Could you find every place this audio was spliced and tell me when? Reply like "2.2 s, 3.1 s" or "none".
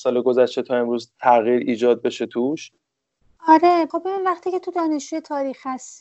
none